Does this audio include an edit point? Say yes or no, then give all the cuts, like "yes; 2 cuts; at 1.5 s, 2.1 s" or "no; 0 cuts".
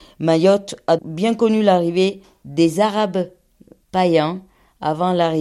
yes; 2 cuts; at 1.0 s, 3.8 s